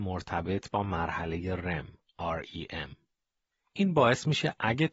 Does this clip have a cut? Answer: no; 0 cuts

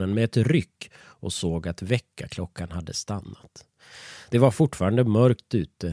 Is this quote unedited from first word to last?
yes; 0 cuts

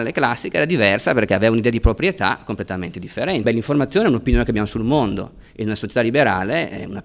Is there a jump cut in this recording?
yes; 1 cut; at 3.4 s

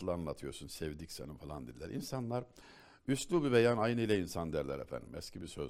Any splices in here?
no; 0 cuts

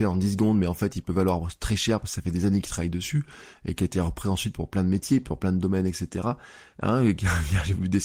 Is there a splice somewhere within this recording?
yes; 1 cut; at 6.7 s

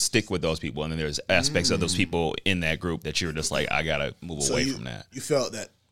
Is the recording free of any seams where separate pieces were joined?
yes; 0 cuts

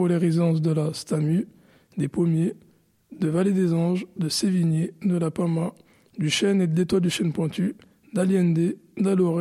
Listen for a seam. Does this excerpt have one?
no; 0 cuts

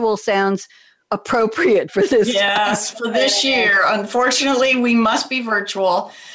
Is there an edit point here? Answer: yes; 1 cut; at 2.9 s

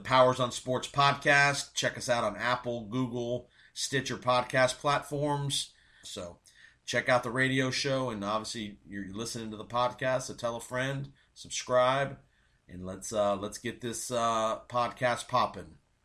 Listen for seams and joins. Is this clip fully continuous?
no; 1 cut; at 6.0 s

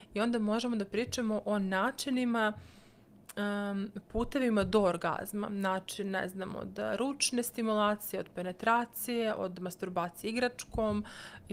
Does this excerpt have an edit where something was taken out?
no; 0 cuts

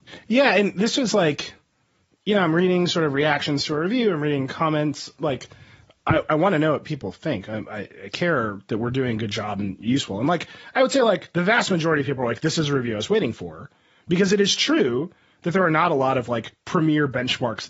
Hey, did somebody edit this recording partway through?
yes; 1 cut; at 5.2 s

